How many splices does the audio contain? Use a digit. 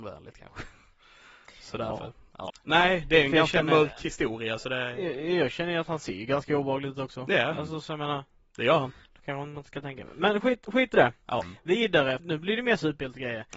2